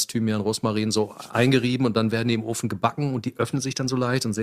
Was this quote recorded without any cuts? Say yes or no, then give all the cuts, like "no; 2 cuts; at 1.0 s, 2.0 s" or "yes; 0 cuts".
yes; 0 cuts